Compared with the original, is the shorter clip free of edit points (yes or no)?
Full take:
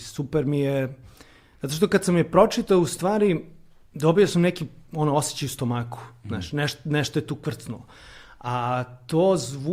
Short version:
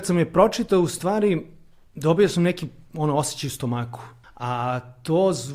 no